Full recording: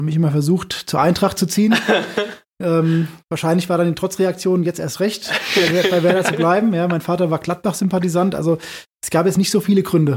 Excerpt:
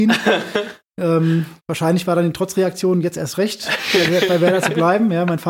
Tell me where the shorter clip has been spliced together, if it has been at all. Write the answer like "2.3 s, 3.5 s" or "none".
none